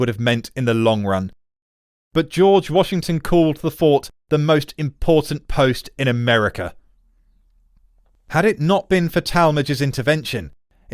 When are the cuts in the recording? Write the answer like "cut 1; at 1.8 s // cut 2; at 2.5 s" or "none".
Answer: cut 1; at 8.1 s